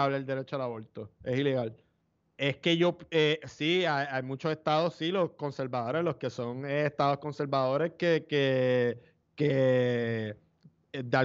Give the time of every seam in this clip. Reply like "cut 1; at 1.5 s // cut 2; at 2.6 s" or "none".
cut 1; at 2.2 s